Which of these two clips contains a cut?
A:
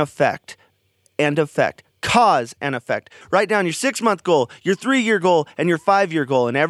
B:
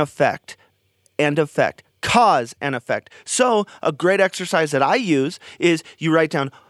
A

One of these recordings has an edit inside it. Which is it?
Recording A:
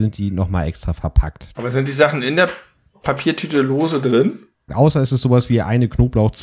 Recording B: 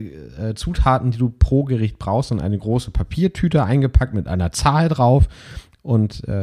A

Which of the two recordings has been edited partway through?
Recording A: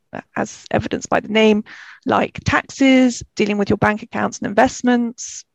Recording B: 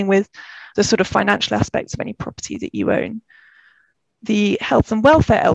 A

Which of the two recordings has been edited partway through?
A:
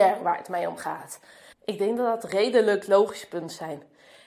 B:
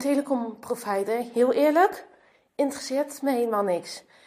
A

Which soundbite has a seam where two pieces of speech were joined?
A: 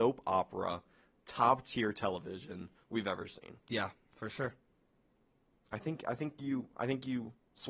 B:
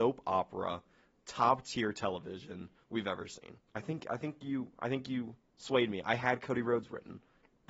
B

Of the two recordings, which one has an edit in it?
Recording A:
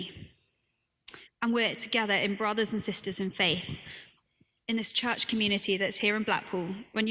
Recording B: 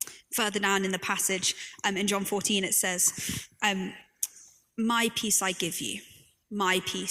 A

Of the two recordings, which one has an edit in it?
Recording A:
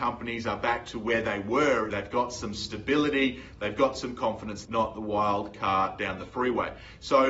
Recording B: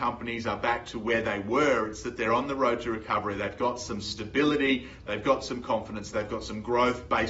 A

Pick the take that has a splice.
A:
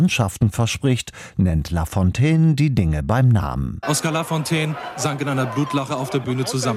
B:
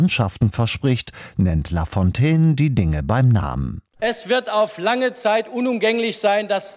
A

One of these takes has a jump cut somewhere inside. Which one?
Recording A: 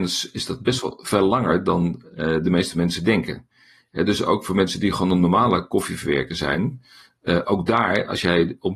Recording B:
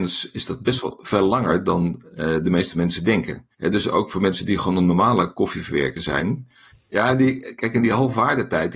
B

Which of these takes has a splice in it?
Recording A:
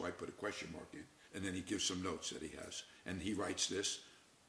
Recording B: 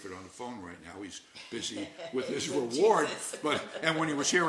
A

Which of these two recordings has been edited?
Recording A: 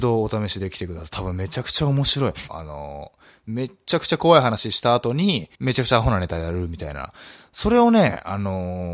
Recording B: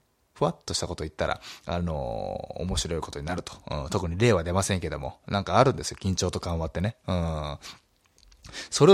A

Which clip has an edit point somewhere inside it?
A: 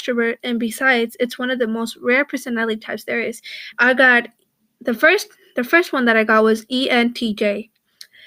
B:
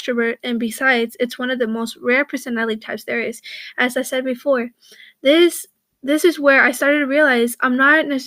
A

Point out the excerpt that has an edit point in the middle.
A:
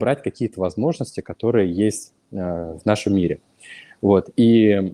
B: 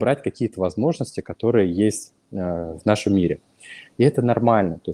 B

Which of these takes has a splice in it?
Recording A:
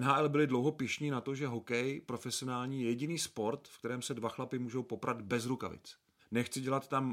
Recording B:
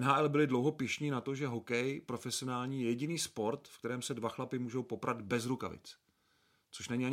A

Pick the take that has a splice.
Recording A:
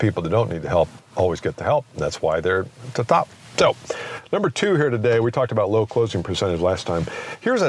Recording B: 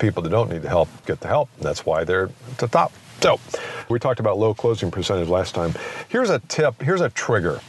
B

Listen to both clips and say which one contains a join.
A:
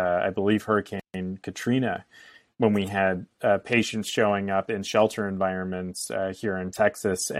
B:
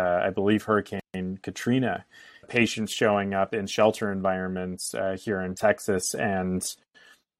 B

